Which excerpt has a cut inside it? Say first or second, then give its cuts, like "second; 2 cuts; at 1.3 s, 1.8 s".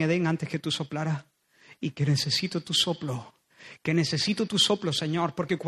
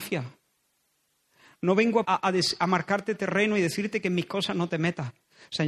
second; 1 cut; at 2.1 s